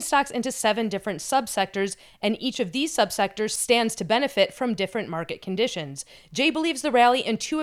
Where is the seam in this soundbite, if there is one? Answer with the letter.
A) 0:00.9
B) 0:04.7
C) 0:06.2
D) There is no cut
D